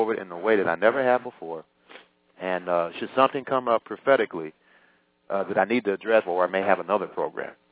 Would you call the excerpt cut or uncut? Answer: cut